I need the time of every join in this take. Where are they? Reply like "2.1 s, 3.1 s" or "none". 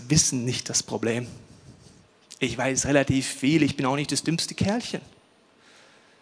none